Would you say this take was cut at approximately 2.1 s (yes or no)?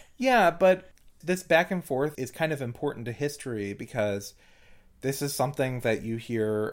yes